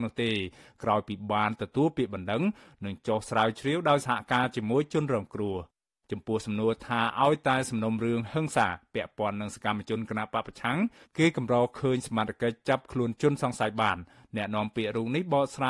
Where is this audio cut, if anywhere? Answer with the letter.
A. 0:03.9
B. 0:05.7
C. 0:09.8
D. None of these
D